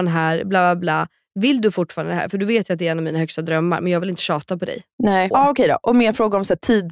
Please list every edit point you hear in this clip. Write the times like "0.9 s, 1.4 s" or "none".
5.3 s